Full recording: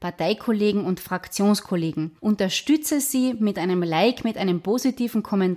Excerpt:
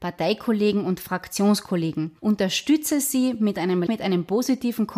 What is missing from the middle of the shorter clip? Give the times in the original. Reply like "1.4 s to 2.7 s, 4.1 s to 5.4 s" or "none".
3.9 s to 4.2 s

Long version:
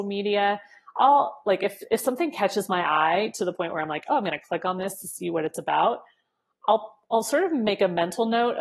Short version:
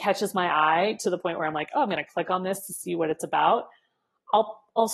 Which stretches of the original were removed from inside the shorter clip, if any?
none

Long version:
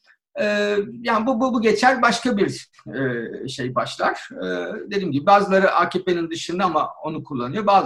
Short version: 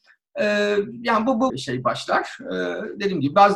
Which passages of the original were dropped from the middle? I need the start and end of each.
1.5 s to 3.4 s

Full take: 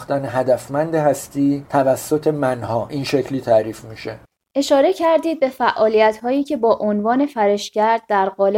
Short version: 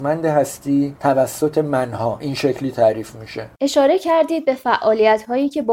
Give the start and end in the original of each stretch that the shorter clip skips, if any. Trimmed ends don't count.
4.2 s to 4.5 s

